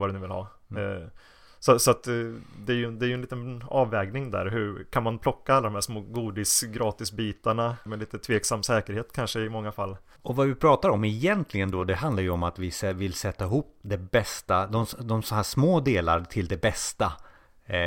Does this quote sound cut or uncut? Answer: cut